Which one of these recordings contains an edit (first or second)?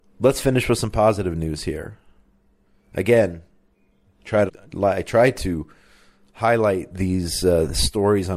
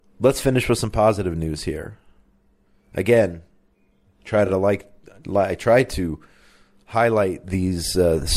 first